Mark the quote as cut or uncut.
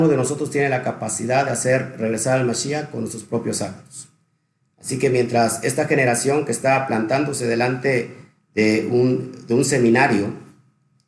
uncut